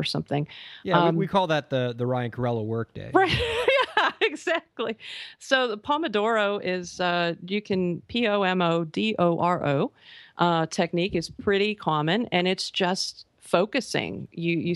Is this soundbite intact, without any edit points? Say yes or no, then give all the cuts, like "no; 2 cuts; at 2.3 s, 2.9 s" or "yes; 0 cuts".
yes; 0 cuts